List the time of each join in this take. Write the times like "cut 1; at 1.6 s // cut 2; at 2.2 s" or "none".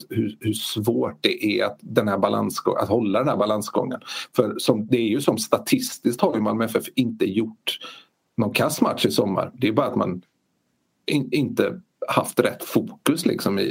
none